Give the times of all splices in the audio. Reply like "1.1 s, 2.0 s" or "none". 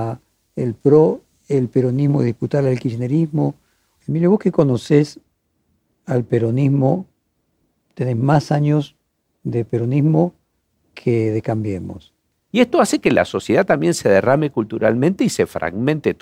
4.0 s, 12.5 s